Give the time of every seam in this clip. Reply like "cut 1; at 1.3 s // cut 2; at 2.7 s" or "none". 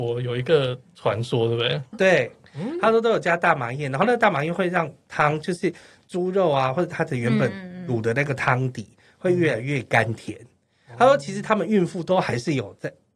cut 1; at 1.9 s